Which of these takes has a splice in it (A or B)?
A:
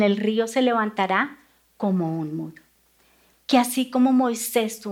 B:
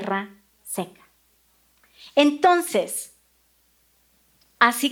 A